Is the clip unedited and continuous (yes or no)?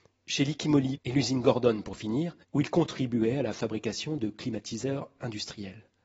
no